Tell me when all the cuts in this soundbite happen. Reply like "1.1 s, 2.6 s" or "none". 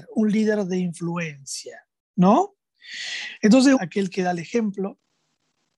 3.8 s